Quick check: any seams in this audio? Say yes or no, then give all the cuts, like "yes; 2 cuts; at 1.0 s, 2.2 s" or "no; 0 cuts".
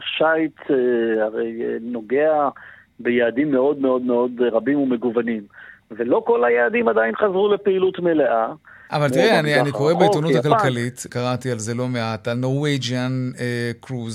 yes; 2 cuts; at 8.9 s, 11.1 s